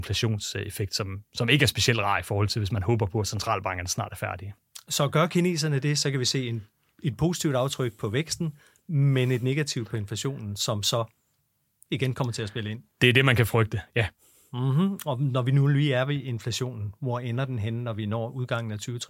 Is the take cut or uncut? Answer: uncut